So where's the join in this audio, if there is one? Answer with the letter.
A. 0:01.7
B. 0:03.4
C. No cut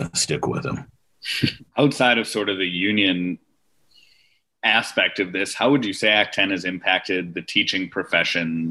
A